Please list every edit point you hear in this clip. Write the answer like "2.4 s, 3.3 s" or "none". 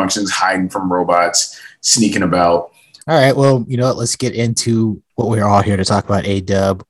3.0 s, 5.1 s